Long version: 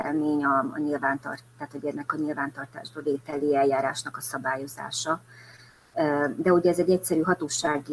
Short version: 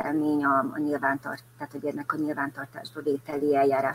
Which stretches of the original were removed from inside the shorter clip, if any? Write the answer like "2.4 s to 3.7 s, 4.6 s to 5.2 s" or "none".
none